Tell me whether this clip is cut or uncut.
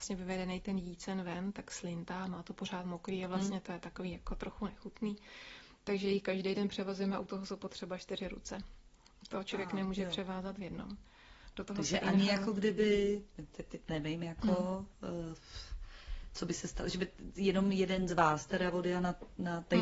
uncut